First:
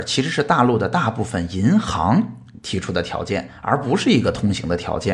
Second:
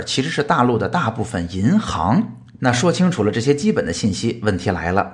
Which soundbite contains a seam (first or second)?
second